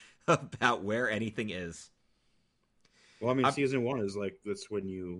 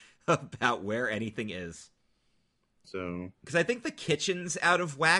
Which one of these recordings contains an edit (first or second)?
second